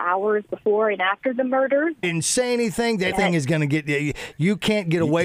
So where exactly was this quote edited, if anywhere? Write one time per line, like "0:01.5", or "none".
0:02.0
0:03.1

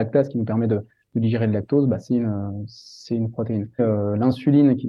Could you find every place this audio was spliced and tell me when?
0:03.8

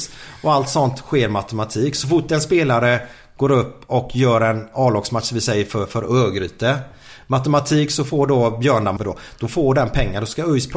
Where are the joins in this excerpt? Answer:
0:09.0

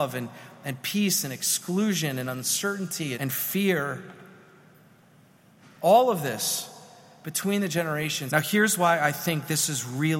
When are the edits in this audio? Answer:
0:03.2
0:08.3

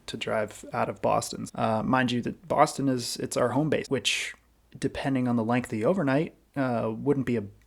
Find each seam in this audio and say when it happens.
0:01.5
0:03.8

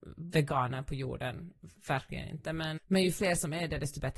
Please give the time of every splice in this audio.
0:02.8

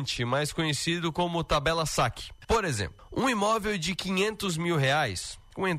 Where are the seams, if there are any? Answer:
0:02.4

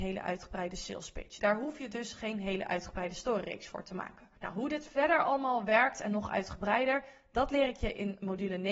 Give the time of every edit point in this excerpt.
0:01.4
0:04.4

